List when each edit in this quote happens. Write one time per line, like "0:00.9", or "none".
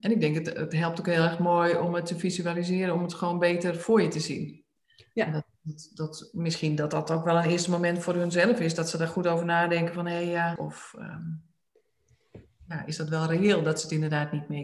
0:10.6